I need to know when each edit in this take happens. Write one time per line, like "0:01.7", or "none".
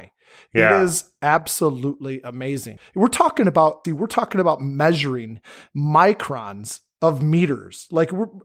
0:03.8